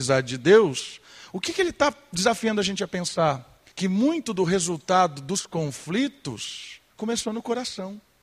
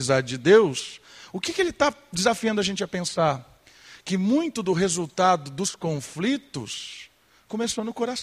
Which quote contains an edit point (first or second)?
first